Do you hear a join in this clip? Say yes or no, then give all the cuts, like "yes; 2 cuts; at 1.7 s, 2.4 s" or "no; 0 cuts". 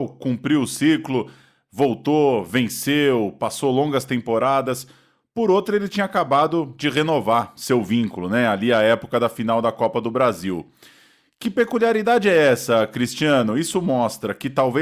no; 0 cuts